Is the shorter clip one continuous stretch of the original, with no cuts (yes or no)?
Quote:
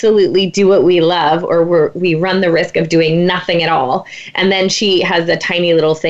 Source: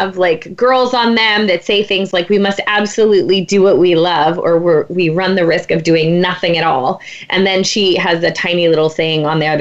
yes